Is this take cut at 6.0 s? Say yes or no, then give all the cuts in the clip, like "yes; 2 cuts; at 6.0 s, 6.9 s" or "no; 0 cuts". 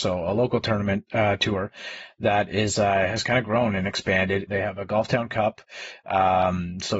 no; 1 cut; at 4.5 s